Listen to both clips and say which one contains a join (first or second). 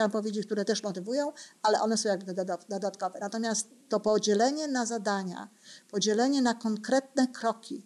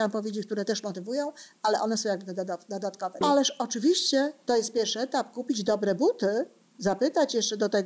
second